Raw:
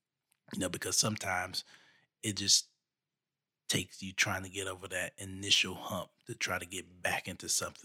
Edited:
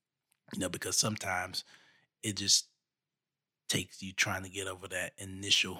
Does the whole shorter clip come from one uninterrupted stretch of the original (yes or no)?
yes